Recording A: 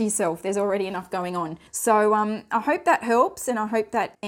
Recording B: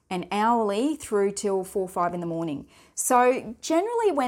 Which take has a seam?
A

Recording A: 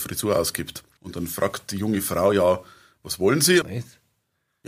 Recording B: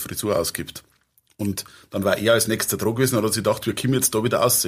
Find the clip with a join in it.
A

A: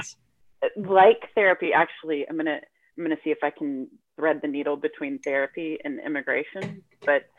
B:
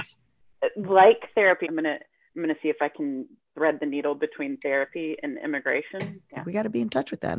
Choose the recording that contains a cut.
B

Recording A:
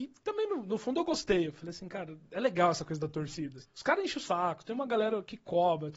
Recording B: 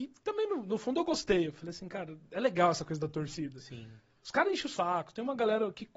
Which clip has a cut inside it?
A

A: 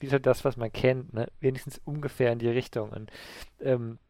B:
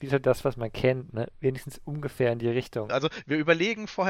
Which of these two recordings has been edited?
B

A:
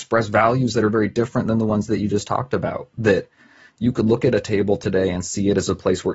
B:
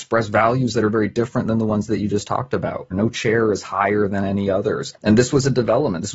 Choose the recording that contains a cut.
B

